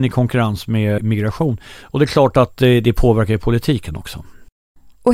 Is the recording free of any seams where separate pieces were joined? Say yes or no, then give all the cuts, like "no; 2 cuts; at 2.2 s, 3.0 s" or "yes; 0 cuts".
no; 1 cut; at 1.0 s